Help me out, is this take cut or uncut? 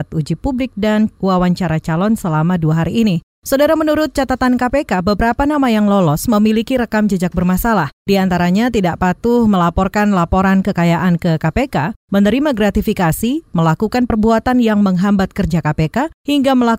uncut